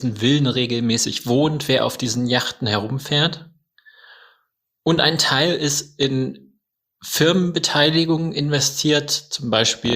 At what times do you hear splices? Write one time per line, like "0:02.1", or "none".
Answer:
none